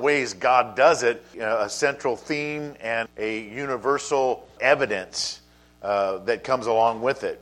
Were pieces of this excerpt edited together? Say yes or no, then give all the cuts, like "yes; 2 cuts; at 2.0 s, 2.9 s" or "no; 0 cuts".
yes; 3 cuts; at 1.3 s, 3.1 s, 4.6 s